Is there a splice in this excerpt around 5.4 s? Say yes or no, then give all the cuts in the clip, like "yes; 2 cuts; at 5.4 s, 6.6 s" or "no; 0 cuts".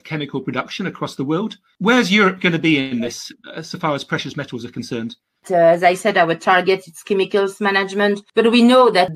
yes; 1 cut; at 5.4 s